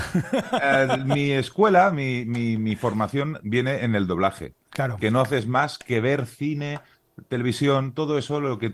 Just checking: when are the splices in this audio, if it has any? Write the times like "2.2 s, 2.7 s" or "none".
none